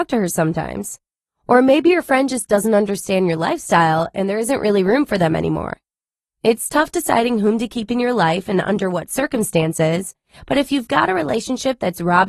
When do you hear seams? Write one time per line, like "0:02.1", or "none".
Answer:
none